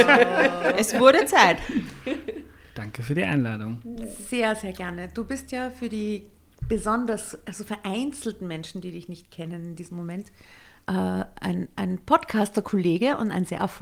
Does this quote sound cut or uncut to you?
uncut